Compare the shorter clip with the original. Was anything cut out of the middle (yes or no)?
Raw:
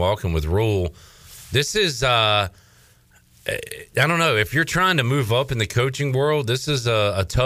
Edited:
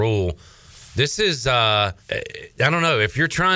yes